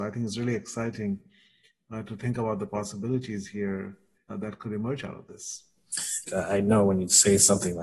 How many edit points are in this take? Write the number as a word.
two